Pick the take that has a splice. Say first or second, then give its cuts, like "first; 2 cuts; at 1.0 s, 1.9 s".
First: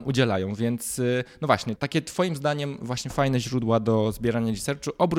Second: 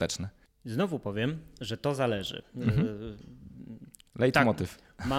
first; 1 cut; at 1.8 s